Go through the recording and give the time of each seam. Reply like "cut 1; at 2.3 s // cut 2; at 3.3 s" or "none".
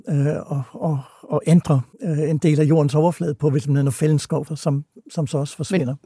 cut 1; at 1.9 s // cut 2; at 4.5 s